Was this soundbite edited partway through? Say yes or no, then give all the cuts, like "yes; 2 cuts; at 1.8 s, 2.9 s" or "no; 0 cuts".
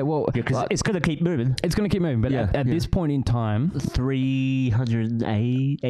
no; 0 cuts